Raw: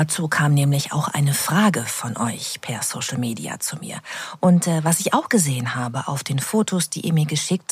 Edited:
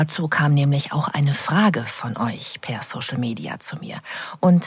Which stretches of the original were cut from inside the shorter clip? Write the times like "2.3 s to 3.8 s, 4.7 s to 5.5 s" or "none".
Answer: none